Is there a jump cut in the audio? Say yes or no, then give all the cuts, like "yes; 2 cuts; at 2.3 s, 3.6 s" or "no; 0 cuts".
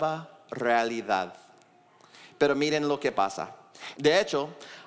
yes; 1 cut; at 3.9 s